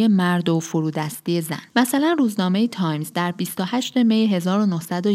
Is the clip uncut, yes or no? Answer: no